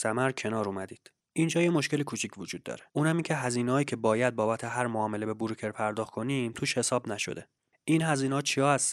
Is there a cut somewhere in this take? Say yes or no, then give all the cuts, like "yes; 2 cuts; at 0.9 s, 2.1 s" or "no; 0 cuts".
yes; 1 cut; at 2.9 s